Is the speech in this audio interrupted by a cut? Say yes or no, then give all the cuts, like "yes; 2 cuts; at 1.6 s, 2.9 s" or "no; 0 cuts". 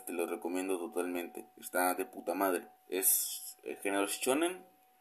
yes; 1 cut; at 2.8 s